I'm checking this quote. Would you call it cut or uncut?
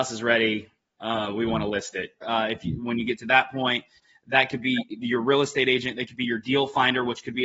cut